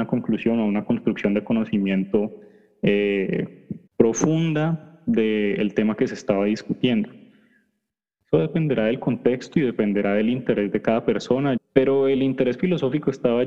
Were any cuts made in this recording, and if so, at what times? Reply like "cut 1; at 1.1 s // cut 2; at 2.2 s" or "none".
cut 1; at 3.9 s // cut 2; at 11.6 s